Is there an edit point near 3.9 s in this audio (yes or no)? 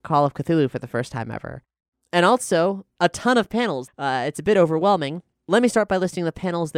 yes